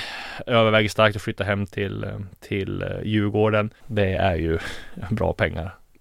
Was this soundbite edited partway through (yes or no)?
yes